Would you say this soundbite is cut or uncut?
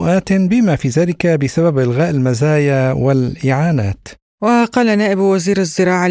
uncut